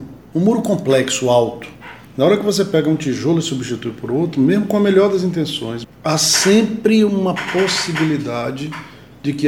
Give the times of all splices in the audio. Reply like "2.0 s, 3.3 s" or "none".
2.1 s, 5.8 s